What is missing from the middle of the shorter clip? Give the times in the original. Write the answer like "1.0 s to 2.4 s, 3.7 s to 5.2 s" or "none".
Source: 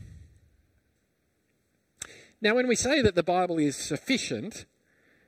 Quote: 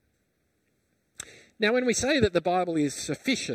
none